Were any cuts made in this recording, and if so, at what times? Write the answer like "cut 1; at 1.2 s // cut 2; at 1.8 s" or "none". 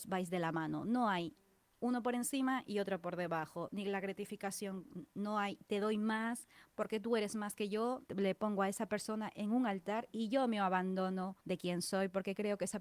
cut 1; at 8.0 s // cut 2; at 11.4 s